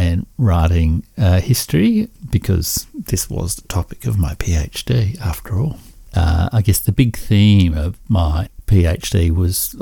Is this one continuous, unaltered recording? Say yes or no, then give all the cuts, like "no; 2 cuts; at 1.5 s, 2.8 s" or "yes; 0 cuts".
yes; 0 cuts